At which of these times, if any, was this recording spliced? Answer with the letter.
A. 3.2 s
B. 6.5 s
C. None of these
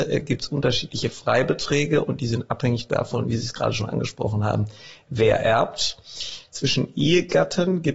C